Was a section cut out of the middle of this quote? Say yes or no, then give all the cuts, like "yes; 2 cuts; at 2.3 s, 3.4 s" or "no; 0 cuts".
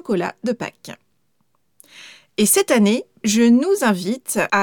yes; 1 cut; at 3.2 s